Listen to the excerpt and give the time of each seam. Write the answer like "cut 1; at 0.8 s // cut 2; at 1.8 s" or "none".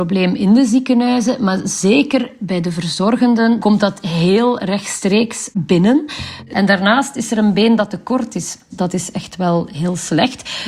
cut 1; at 3.6 s // cut 2; at 6.5 s // cut 3; at 8.7 s